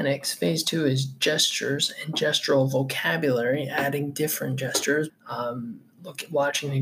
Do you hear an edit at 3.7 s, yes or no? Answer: no